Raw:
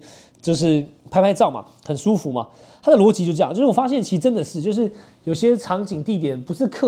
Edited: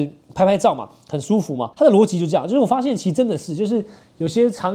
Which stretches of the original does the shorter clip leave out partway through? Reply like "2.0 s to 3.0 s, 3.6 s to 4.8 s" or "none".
2.5 s to 2.8 s